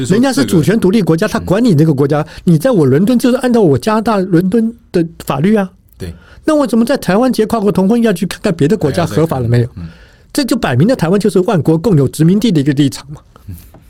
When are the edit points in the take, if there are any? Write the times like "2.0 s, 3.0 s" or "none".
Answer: 3.2 s